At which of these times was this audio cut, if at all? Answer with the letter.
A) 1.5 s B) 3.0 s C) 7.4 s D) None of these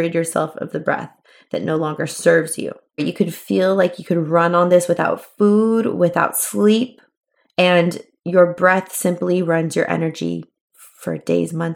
B